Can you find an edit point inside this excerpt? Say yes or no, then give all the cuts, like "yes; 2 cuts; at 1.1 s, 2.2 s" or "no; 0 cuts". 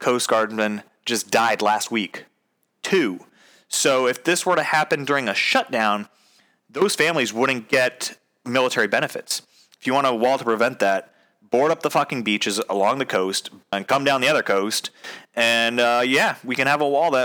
yes; 2 cuts; at 9.7 s, 13.7 s